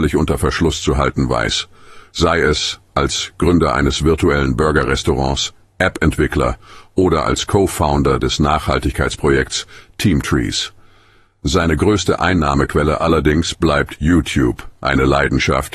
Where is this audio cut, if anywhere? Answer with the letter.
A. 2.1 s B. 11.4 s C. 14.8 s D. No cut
A